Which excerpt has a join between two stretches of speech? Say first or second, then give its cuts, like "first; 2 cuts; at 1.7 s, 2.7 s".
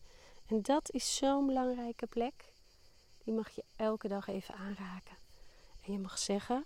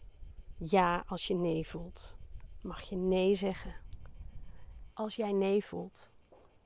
second; 1 cut; at 4.9 s